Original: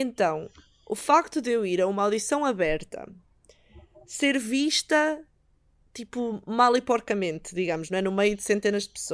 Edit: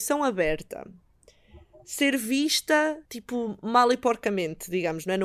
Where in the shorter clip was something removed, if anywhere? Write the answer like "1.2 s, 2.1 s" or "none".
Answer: 3.1 s